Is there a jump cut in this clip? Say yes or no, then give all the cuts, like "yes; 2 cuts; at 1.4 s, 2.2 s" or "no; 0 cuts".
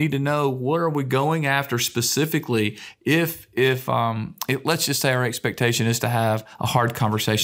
no; 0 cuts